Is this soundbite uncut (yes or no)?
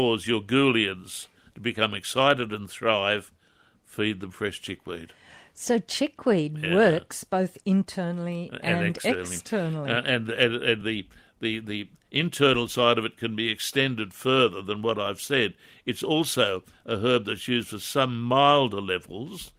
yes